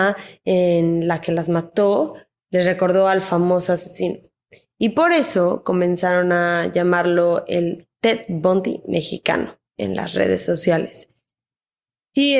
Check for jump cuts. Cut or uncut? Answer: uncut